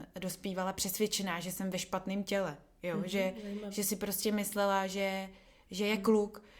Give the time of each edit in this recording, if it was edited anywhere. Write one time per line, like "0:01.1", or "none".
none